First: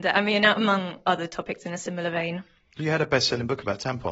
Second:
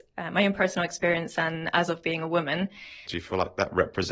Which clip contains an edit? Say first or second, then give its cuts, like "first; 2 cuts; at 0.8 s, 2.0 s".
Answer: second; 1 cut; at 3.1 s